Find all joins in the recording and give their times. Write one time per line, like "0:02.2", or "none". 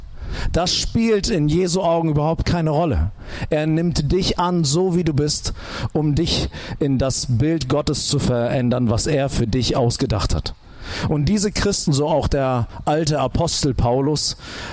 none